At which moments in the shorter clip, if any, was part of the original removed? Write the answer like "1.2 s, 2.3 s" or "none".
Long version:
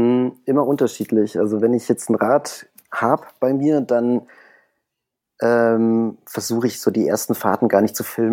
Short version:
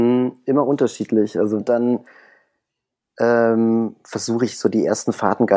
1.6 s